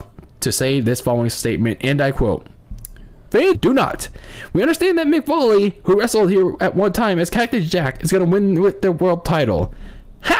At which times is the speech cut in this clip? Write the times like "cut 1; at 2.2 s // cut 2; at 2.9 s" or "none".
cut 1; at 3.5 s